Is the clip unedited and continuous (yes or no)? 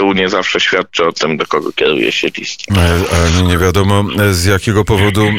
yes